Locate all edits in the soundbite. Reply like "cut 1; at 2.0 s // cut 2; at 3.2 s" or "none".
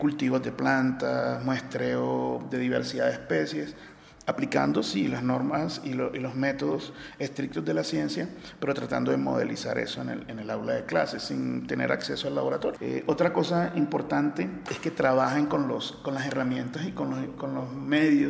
cut 1; at 12.8 s